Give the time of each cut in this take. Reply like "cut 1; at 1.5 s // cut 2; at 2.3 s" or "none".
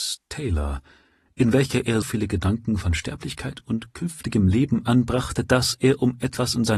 cut 1; at 2.0 s